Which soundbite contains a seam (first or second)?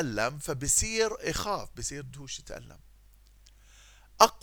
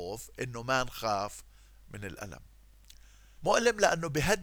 second